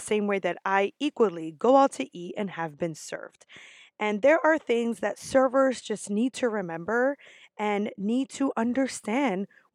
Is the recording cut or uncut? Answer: uncut